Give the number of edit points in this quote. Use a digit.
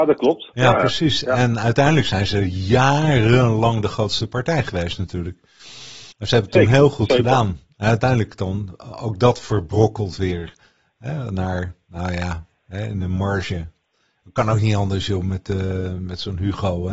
1